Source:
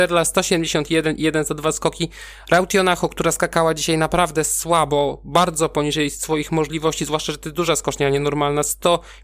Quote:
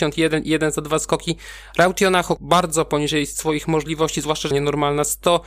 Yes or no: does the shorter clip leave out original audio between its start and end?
yes